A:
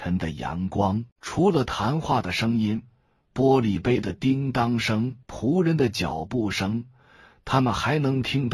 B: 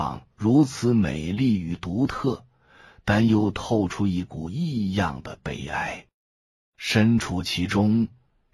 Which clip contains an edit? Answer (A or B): A